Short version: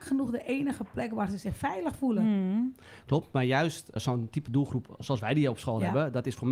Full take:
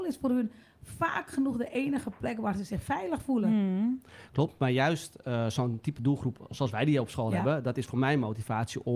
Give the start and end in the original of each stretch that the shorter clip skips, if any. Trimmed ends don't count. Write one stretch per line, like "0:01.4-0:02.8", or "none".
0:05.2-0:05.5